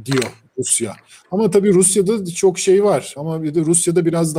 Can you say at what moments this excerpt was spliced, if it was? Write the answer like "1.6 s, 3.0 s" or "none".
3.2 s